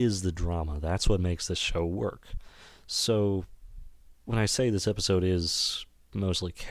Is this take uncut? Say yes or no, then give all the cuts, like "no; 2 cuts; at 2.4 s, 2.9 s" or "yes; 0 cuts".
yes; 0 cuts